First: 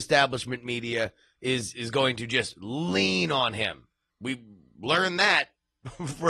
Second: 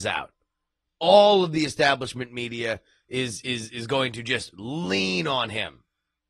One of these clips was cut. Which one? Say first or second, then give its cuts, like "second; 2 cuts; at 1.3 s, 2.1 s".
first; 2 cuts; at 1.7 s, 4.1 s